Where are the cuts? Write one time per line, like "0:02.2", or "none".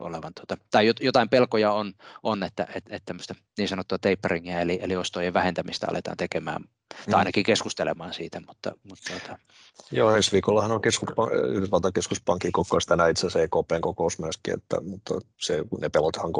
none